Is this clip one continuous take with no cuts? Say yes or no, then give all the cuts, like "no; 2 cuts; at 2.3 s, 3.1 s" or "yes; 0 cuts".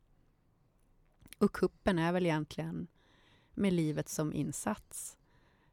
yes; 0 cuts